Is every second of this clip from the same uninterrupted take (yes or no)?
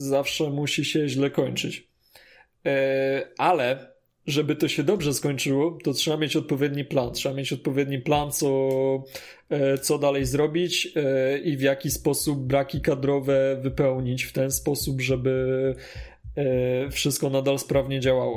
yes